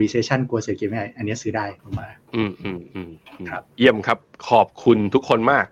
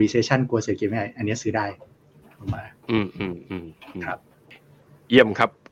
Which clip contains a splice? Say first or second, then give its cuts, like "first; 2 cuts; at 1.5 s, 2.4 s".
first; 2 cuts; at 1.8 s, 3.7 s